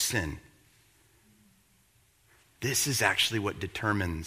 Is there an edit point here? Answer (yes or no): yes